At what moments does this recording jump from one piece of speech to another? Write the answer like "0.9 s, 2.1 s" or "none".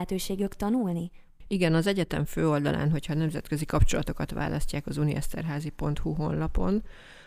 none